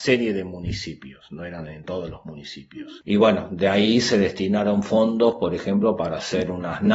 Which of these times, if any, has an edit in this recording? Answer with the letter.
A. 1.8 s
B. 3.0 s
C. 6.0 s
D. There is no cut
B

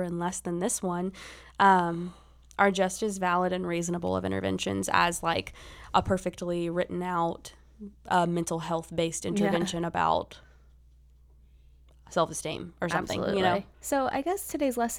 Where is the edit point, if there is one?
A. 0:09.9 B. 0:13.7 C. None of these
B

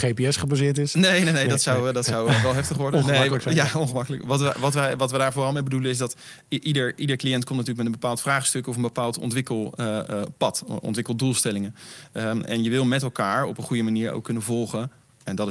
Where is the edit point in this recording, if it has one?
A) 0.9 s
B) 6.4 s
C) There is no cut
C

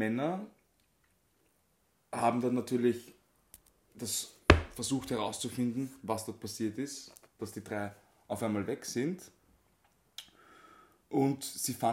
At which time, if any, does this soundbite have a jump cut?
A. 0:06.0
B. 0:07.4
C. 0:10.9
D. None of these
B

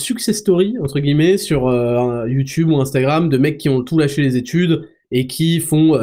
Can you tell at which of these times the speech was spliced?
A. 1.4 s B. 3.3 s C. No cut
C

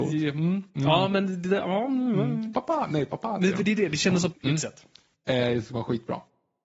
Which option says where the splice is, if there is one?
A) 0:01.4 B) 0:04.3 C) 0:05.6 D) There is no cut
B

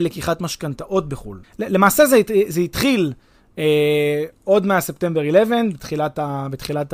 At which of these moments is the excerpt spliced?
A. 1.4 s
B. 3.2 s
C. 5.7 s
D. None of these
A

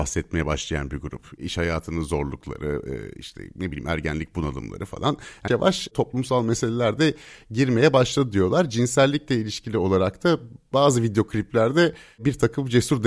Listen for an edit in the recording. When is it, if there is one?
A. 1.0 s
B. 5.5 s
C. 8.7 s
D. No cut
B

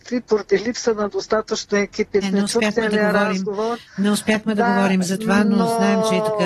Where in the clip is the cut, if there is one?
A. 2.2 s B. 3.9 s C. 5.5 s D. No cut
A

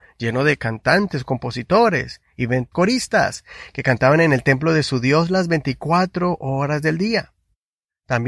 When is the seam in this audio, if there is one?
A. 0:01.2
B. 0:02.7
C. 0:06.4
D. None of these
B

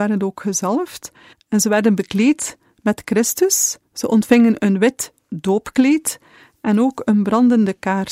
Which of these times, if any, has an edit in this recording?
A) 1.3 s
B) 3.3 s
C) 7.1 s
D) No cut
A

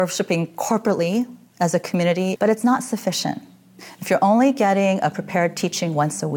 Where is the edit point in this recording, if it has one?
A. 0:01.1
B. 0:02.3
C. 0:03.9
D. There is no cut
B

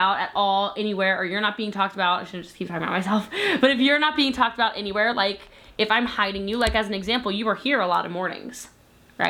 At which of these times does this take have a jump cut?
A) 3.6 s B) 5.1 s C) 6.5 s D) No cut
D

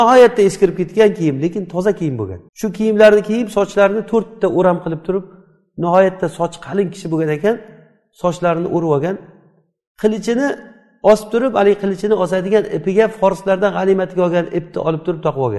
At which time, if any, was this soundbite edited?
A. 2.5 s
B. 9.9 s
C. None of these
A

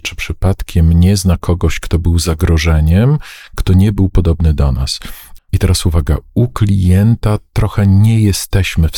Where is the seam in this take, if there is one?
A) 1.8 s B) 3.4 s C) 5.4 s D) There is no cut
C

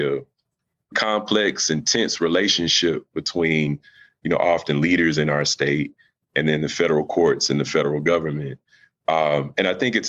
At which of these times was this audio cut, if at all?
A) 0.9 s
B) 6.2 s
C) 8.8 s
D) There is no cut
A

